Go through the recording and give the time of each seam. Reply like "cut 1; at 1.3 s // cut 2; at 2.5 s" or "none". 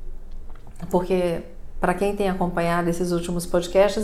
none